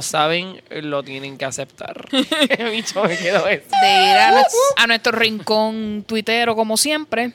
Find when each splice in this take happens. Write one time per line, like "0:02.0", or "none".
0:02.1
0:03.7

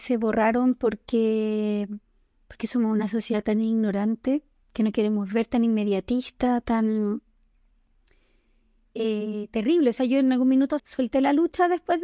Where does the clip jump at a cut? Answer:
0:10.8

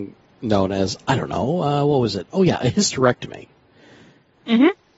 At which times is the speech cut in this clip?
none

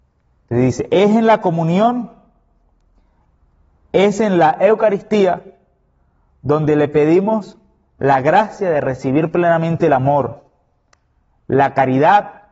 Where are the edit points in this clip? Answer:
none

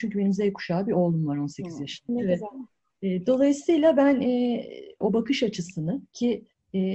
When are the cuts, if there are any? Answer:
0:02.1
0:05.0

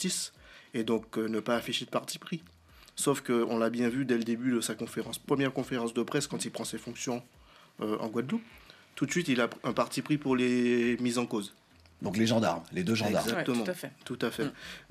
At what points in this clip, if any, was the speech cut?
none

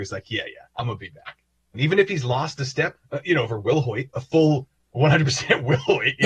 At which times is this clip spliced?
0:01.7
0:02.9

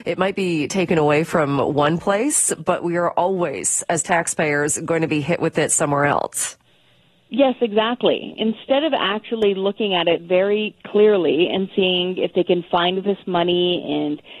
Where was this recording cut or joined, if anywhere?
none

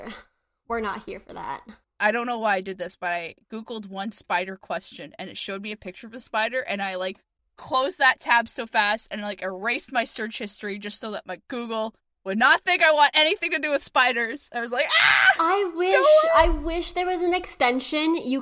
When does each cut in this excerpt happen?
none

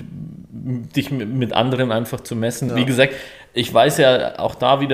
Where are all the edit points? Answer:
0:02.7

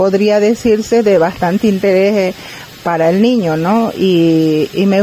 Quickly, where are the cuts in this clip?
none

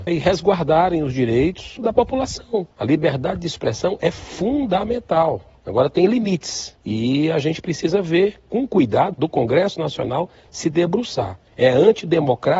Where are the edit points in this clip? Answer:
0:09.1

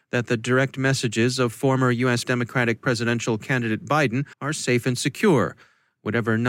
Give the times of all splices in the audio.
0:02.2
0:04.3

